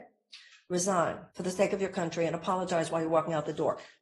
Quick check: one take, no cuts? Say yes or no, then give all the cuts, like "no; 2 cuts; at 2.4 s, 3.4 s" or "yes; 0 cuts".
no; 1 cut; at 1.3 s